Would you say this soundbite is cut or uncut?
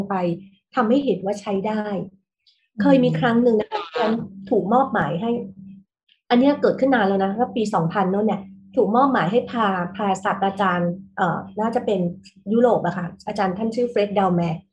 uncut